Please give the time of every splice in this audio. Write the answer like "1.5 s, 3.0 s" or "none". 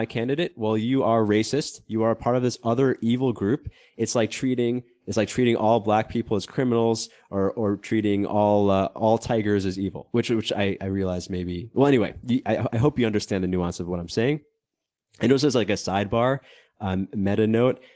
none

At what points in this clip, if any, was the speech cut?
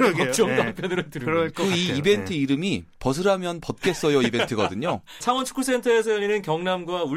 5.2 s

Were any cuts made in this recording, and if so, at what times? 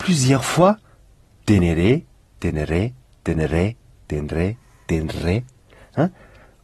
none

